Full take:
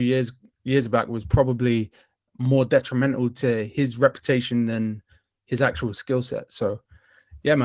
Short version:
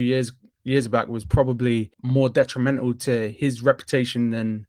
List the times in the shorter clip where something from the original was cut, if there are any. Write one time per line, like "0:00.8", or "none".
0:01.9